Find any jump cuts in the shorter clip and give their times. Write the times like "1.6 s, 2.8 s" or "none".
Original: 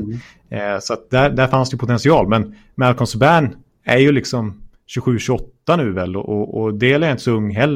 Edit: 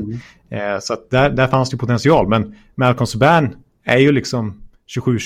none